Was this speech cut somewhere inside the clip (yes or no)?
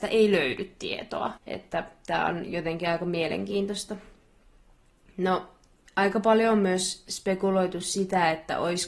yes